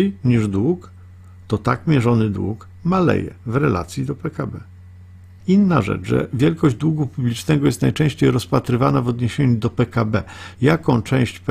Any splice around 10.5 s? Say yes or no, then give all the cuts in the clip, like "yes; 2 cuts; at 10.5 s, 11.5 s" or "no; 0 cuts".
yes; 2 cuts; at 5.4 s, 10.5 s